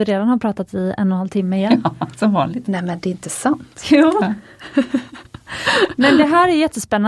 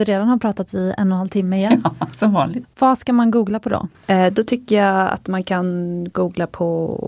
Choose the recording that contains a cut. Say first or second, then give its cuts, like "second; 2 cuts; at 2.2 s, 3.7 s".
second; 1 cut; at 2.6 s